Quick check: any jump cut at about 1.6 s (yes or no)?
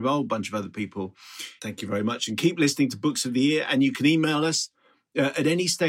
yes